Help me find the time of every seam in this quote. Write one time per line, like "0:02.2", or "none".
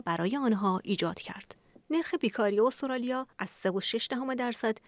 0:01.7
0:03.3